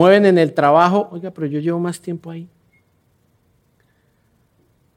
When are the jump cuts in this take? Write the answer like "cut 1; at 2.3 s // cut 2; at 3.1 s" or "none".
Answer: none